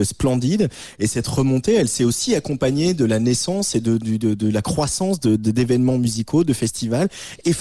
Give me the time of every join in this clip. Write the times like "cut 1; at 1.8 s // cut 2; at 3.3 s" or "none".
none